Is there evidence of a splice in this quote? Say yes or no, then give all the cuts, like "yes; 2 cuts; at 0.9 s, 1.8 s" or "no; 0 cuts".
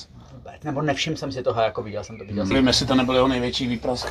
yes; 1 cut; at 2.5 s